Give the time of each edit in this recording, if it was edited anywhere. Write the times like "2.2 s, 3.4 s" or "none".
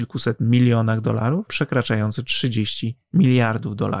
1.5 s

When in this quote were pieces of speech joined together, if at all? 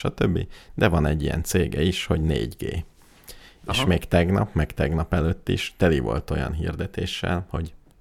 none

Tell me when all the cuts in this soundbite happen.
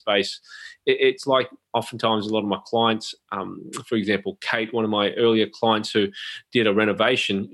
none

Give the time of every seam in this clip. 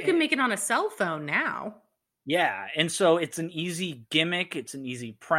none

